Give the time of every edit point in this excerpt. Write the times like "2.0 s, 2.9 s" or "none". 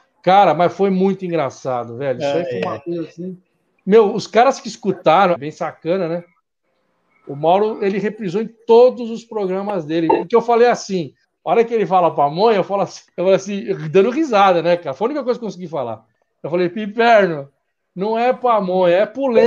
5.4 s, 13.1 s